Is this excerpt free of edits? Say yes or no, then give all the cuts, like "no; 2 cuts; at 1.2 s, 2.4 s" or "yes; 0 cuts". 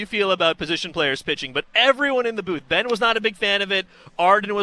yes; 0 cuts